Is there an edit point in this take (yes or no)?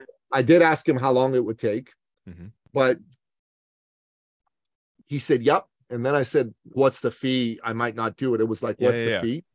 yes